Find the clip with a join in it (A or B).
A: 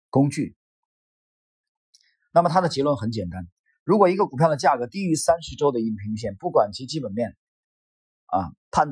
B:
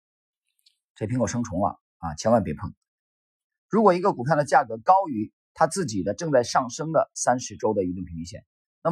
B